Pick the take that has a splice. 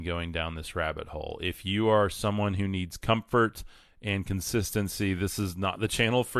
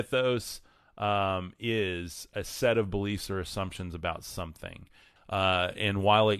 second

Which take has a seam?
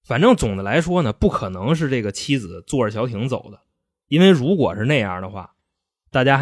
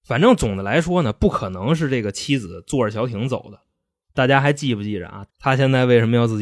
second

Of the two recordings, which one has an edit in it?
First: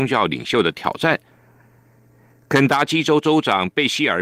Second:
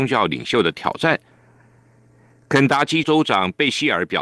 second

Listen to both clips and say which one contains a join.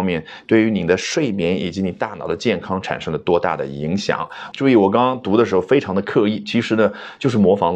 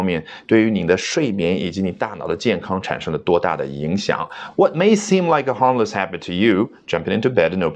first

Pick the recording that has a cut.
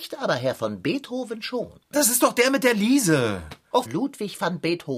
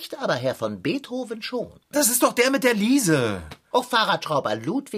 first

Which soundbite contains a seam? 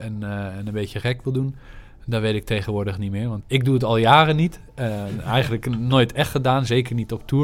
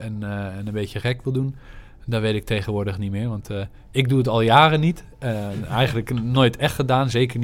first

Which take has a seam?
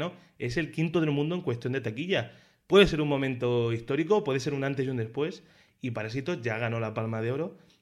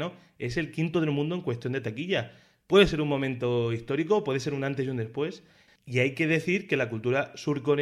second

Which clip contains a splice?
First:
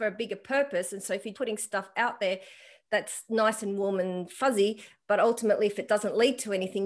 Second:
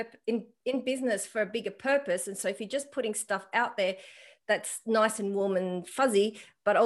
first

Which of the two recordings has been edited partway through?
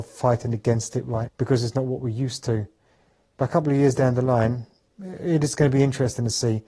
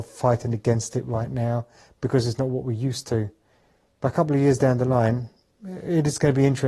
first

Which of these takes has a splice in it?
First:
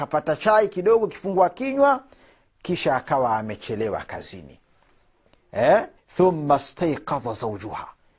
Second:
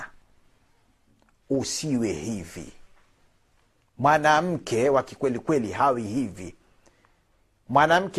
first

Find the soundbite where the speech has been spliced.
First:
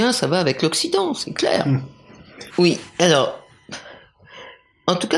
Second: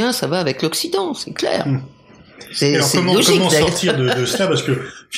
first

